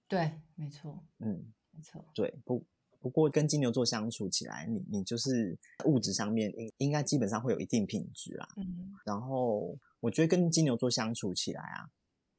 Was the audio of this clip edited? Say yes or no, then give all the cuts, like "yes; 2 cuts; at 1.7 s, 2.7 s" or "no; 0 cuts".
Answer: no; 0 cuts